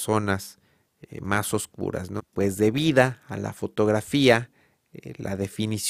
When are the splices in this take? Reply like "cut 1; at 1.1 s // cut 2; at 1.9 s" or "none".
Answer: cut 1; at 2.2 s